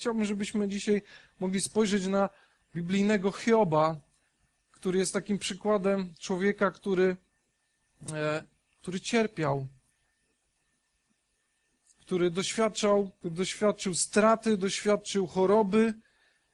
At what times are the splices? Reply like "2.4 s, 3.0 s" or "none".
13.2 s